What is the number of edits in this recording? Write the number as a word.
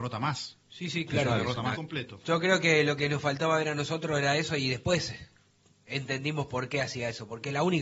one